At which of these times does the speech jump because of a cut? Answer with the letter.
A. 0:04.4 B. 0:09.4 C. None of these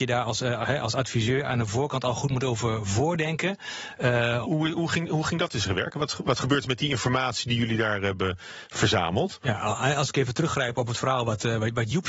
A